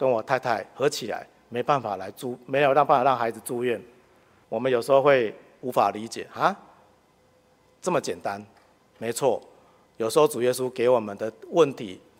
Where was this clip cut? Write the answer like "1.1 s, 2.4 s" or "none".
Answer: 4.4 s